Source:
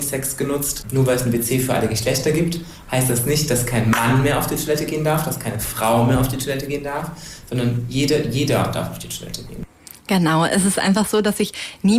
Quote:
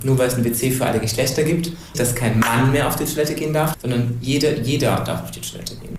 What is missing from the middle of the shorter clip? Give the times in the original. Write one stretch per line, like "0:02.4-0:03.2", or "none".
0:02.8-0:03.5
0:05.2-0:07.4